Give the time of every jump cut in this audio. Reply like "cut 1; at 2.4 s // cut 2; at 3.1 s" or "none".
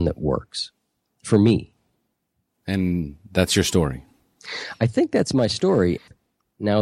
none